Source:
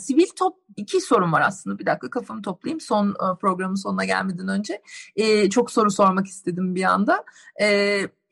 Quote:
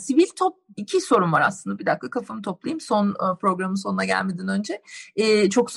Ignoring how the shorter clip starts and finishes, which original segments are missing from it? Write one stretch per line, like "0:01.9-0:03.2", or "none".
none